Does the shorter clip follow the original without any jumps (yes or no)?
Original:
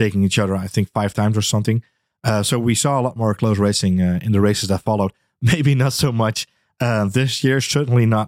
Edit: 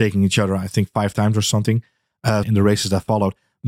no